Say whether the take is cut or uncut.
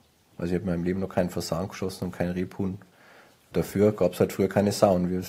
uncut